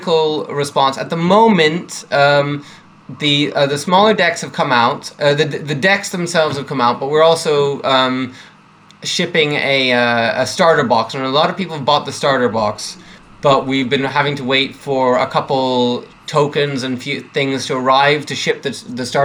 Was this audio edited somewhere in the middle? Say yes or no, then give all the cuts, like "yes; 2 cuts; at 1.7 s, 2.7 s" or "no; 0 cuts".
no; 0 cuts